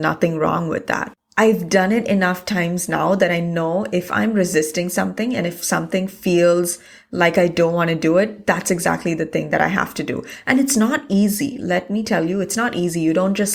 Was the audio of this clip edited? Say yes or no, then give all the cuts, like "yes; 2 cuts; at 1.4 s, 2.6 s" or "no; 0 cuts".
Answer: no; 0 cuts